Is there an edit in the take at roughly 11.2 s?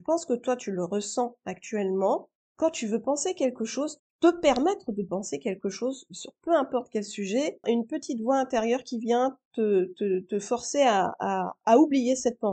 no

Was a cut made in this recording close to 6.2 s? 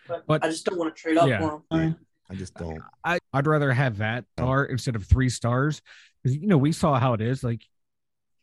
no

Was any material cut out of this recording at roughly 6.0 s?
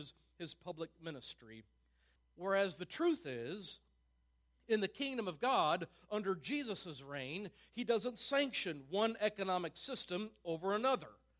no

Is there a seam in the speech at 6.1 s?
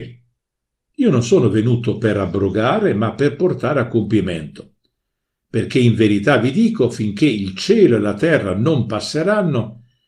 no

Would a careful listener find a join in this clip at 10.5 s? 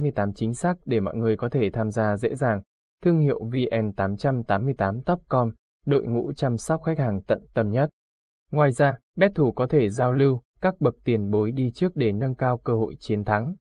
yes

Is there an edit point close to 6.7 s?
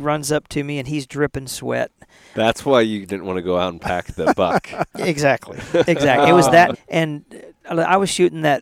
yes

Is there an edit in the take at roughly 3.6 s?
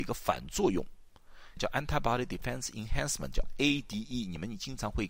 no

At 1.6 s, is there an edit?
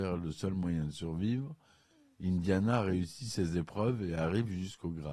no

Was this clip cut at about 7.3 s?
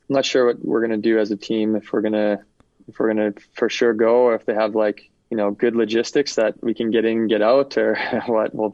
no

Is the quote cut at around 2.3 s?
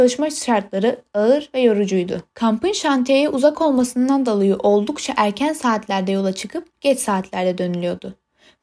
yes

